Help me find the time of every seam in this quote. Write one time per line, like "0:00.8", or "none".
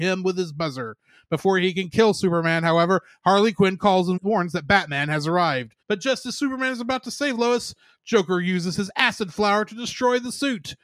0:04.2
0:05.8